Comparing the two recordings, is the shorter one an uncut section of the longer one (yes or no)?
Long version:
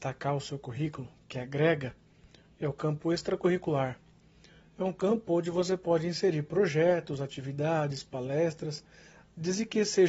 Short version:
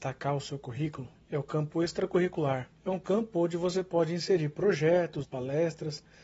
no